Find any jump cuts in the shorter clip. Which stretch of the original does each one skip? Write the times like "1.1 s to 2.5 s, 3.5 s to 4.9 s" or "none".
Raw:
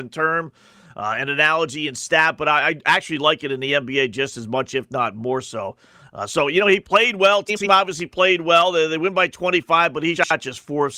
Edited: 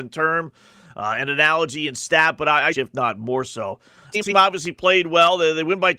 2.7 s to 4.7 s, 6.1 s to 7.4 s